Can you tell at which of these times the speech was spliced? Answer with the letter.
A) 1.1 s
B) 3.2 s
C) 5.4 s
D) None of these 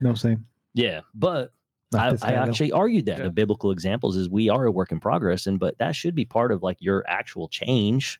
B